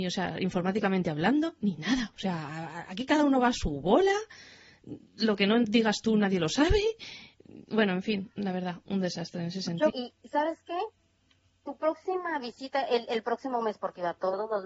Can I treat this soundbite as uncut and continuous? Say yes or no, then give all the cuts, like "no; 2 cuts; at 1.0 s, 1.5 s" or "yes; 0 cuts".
no; 1 cut; at 9.9 s